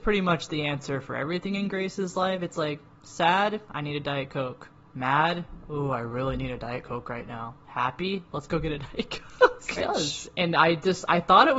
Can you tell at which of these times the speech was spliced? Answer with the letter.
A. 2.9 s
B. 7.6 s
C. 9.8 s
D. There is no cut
C